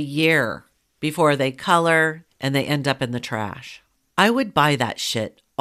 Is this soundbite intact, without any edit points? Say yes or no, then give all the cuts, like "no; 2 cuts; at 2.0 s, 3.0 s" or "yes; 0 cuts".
no; 1 cut; at 2.3 s